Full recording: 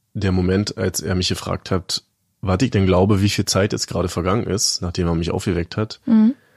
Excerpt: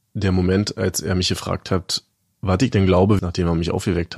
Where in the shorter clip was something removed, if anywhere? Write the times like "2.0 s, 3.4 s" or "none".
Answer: 3.2 s